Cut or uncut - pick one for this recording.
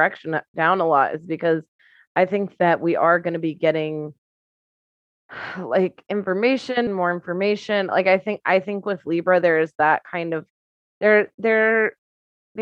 cut